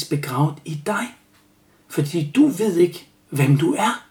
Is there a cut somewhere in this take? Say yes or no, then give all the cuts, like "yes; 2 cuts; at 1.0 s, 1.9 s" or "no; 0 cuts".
no; 0 cuts